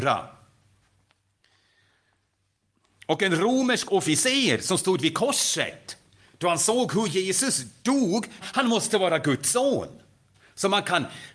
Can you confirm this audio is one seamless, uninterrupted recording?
no; 1 cut; at 8.4 s

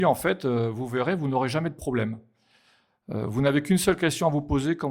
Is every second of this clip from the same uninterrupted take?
yes; 0 cuts

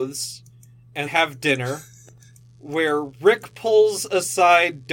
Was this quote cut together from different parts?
yes; 1 cut; at 1.0 s

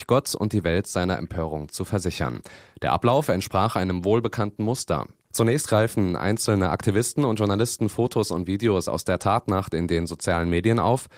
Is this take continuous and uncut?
yes; 0 cuts

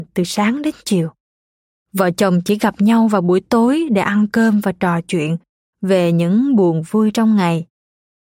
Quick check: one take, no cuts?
yes; 0 cuts

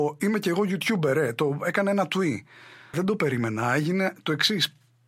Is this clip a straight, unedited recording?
no; 1 cut; at 2.9 s

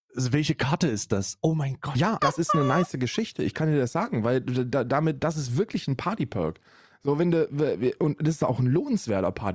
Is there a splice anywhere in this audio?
yes; 1 cut; at 2.2 s

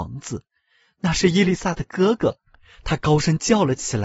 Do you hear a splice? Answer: no; 0 cuts

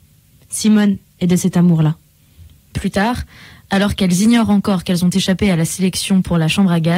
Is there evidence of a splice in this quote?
no; 0 cuts

